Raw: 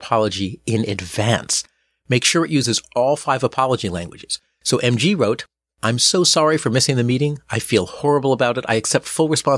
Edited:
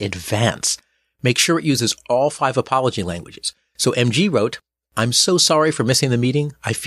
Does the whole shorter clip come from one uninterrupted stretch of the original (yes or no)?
yes